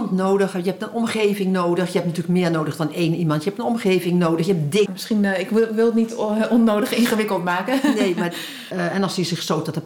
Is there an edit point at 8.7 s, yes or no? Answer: yes